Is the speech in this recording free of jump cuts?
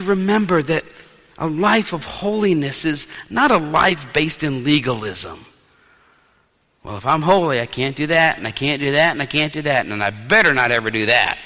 no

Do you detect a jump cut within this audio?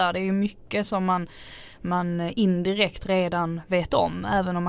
no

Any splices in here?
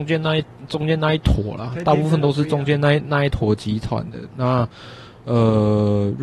yes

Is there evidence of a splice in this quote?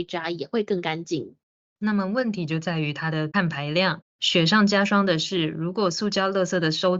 yes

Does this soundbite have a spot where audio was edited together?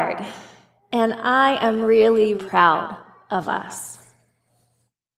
yes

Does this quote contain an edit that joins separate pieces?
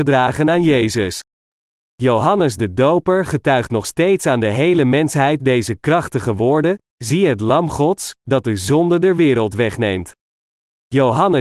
no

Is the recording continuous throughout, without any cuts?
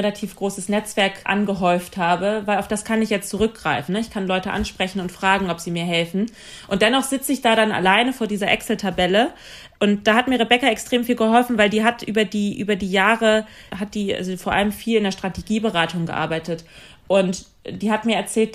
yes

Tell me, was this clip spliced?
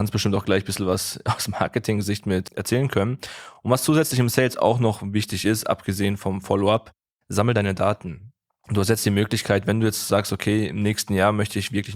no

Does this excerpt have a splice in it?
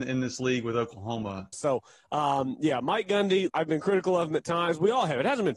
yes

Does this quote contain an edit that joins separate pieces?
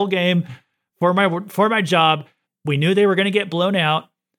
yes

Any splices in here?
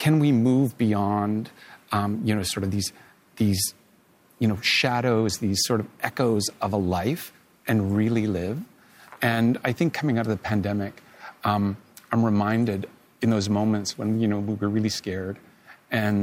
no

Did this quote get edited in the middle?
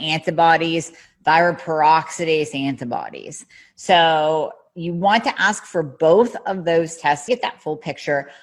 yes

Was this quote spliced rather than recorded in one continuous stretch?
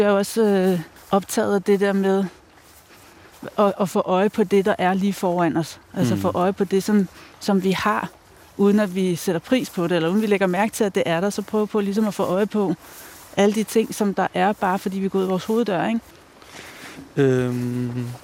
no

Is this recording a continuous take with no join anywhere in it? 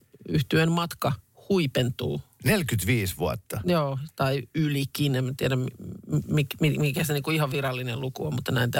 yes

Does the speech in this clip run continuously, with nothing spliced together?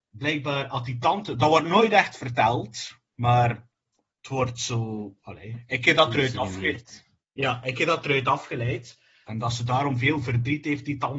no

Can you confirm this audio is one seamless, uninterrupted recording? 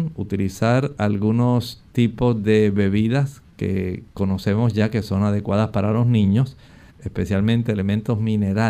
no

